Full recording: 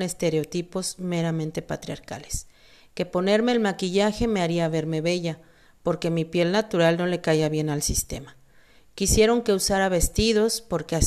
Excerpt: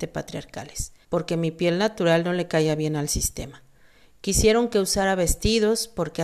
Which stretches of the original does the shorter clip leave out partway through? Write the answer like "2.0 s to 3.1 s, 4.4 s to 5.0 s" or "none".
2.6 s to 5.8 s